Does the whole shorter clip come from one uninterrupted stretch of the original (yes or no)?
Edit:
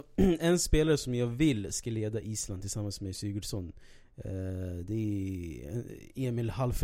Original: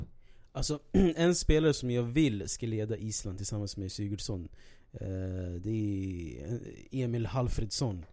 yes